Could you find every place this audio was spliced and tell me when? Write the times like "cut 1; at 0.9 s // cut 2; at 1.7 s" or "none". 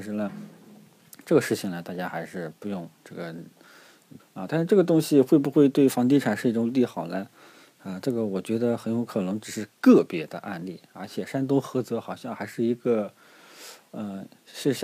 cut 1; at 4.2 s